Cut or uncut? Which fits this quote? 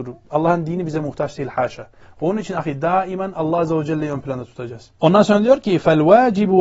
cut